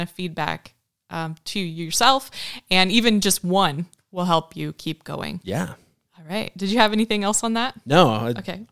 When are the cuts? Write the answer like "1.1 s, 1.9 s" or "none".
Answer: 6.0 s